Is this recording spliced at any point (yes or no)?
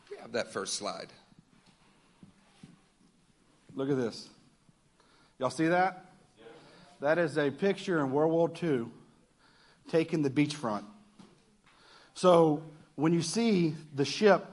no